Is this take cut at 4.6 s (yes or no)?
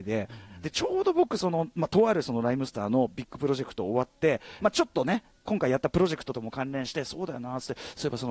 yes